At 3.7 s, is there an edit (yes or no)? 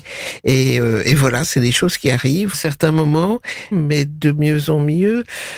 yes